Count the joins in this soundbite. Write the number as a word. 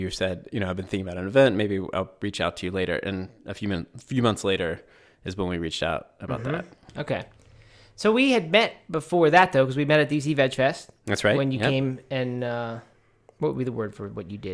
zero